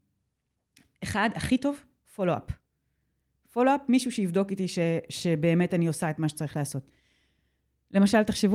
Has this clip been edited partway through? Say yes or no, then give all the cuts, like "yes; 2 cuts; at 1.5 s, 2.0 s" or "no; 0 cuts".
no; 0 cuts